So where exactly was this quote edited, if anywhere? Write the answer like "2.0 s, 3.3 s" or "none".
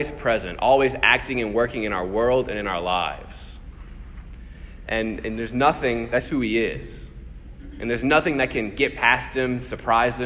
6.2 s